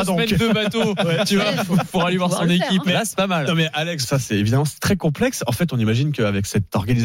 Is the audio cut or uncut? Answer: cut